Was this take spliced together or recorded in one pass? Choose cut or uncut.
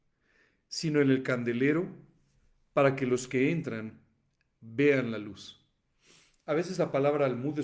uncut